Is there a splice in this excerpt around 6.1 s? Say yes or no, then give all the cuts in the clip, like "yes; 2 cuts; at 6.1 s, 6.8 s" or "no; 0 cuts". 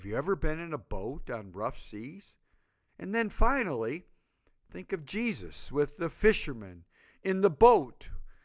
no; 1 cut; at 2.9 s